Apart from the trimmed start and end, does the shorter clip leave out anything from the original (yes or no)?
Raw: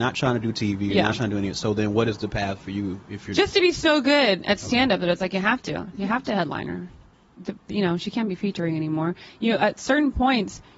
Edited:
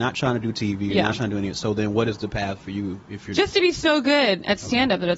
no